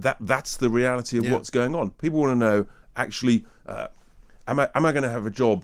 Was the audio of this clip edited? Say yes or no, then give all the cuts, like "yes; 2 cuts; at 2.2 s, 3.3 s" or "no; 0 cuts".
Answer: no; 0 cuts